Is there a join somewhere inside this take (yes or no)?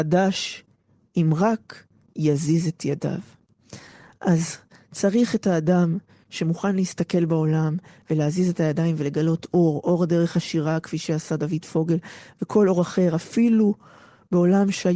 no